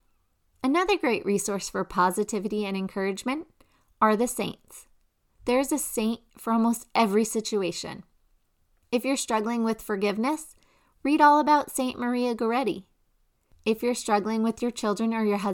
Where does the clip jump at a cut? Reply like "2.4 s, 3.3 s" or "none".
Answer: none